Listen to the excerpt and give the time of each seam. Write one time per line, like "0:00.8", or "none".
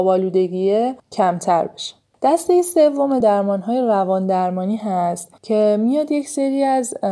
0:03.2